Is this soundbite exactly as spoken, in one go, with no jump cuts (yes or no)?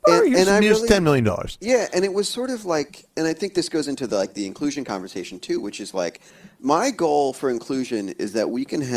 yes